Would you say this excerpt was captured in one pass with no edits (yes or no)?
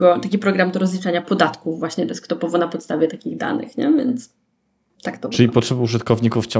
no